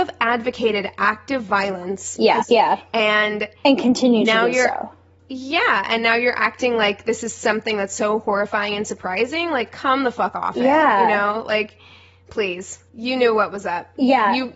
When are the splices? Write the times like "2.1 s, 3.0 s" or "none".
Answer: 2.4 s, 12.9 s